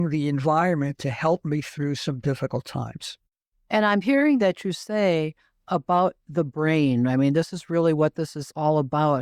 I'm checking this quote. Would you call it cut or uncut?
uncut